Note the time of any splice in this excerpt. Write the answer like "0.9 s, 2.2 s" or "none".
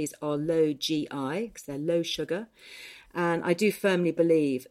1.5 s

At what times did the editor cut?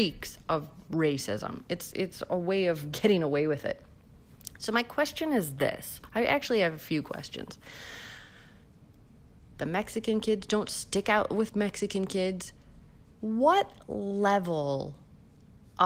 9.5 s, 13.1 s

